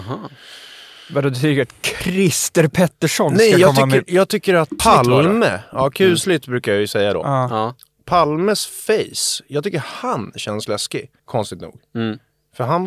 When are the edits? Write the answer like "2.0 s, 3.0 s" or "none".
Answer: 4.8 s, 11.2 s